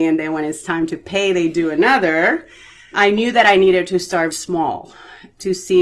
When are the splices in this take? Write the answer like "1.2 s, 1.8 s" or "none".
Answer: 2.9 s, 4.3 s